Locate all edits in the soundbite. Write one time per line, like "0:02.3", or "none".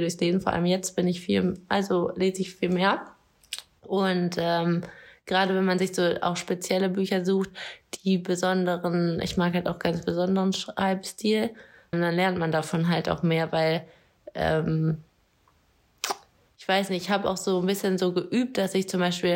0:11.9